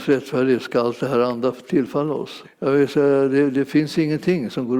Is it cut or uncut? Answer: cut